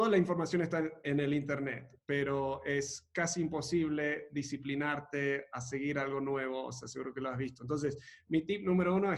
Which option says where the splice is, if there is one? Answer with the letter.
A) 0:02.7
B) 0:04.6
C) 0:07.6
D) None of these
D